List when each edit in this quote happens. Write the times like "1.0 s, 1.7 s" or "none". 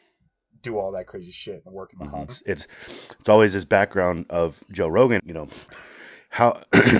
2.3 s, 5.2 s